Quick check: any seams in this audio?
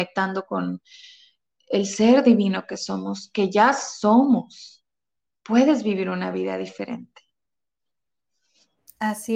no; 0 cuts

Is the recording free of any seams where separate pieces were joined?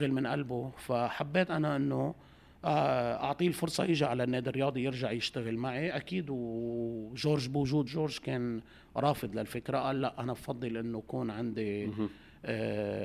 no; 1 cut; at 7.9 s

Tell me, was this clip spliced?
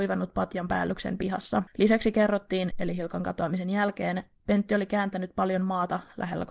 yes; 1 cut; at 2.7 s

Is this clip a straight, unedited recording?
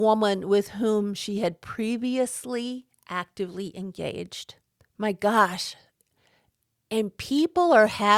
yes; 0 cuts

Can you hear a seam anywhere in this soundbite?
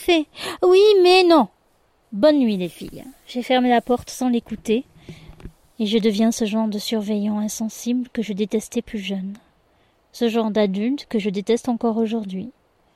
no; 0 cuts

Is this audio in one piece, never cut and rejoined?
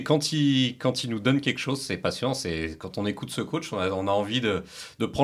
yes; 0 cuts

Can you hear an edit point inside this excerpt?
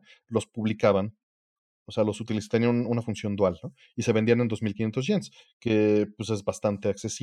no; 0 cuts

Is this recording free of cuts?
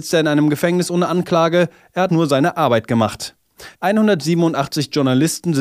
no; 2 cuts; at 2.1 s, 3.7 s

